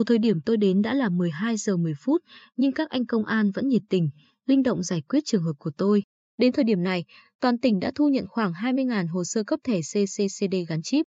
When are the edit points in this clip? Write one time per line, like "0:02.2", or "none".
none